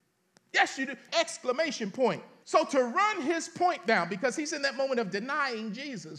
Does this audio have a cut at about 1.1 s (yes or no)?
yes